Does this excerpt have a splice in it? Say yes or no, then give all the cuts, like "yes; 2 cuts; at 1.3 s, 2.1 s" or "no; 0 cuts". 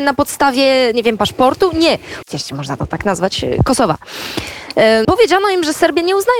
yes; 2 cuts; at 2.2 s, 5.0 s